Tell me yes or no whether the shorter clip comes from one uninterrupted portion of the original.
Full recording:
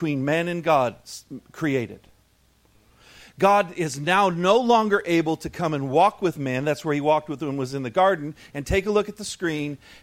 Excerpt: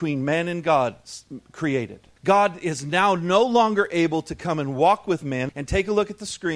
no